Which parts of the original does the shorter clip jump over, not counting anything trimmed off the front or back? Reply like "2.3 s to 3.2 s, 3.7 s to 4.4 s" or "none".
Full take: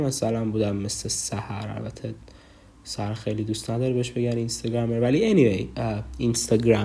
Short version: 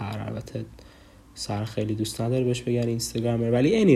none